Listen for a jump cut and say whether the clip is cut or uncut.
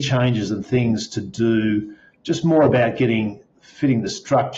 cut